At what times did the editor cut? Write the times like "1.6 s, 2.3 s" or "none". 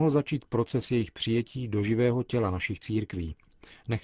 none